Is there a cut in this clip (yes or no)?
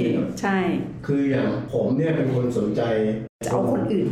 no